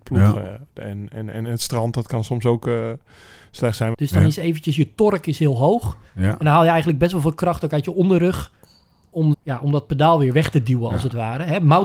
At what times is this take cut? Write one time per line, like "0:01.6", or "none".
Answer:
0:03.9
0:09.3